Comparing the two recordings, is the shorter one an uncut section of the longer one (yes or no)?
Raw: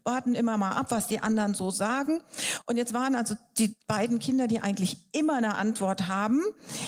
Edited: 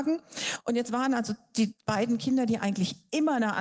yes